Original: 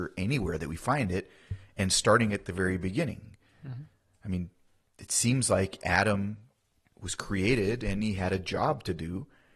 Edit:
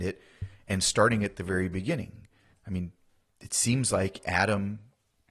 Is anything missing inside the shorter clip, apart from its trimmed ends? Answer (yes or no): yes